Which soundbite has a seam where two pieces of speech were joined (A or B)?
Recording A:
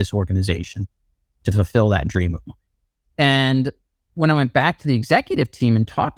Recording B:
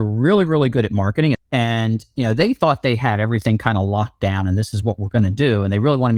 B